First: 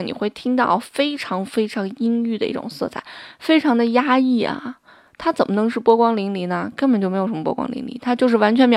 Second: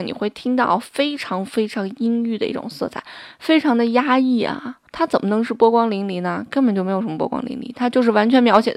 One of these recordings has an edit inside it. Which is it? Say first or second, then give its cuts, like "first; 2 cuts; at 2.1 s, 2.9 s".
second; 1 cut; at 4.9 s